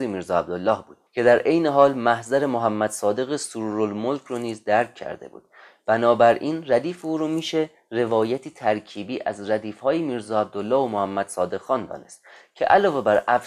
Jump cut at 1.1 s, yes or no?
yes